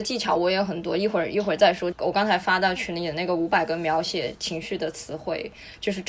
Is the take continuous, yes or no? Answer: no